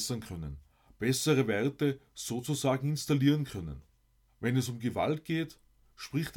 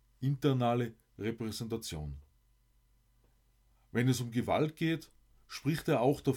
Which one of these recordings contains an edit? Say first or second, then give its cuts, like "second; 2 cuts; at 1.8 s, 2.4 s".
first; 1 cut; at 4.3 s